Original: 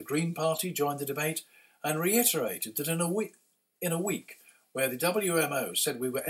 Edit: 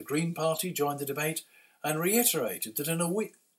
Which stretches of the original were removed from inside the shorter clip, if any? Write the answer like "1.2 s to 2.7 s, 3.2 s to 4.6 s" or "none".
none